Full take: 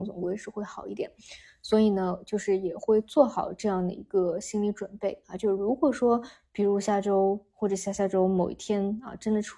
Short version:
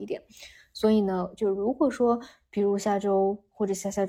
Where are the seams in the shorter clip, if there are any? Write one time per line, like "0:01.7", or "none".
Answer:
0:01.4